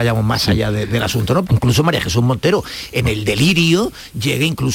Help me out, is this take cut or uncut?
cut